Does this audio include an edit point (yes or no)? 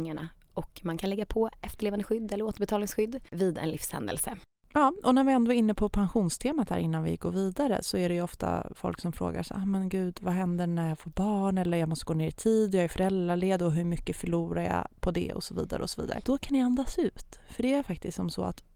no